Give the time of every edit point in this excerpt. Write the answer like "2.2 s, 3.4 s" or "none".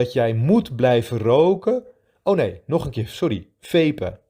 none